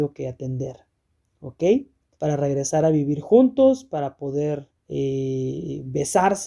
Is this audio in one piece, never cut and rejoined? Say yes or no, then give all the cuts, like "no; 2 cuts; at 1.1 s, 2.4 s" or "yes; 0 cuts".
no; 2 cuts; at 2.1 s, 4.8 s